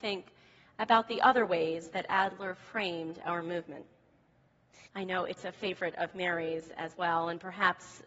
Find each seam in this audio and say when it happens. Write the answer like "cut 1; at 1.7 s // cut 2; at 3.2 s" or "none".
cut 1; at 4.8 s